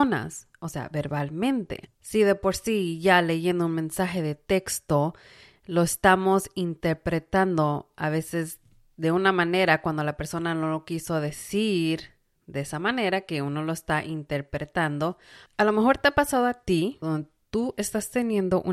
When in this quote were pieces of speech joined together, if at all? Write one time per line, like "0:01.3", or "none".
0:15.5
0:17.0